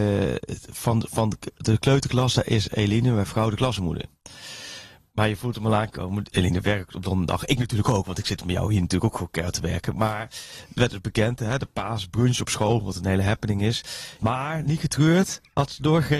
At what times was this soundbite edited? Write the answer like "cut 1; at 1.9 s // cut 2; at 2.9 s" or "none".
cut 1; at 6.3 s // cut 2; at 14.2 s